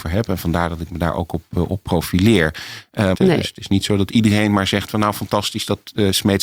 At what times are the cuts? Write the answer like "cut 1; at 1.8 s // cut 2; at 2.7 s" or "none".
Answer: cut 1; at 3.1 s